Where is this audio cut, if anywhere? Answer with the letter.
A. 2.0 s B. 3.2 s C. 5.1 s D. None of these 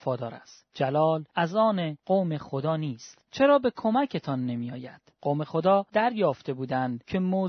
B